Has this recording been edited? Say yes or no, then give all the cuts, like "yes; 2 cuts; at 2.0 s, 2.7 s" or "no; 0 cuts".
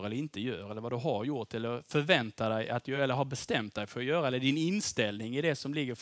no; 0 cuts